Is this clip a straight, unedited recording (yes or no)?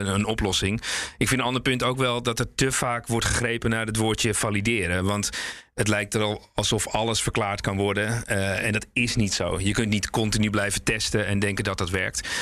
yes